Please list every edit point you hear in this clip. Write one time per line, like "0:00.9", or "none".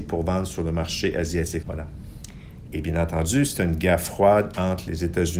0:01.6
0:02.7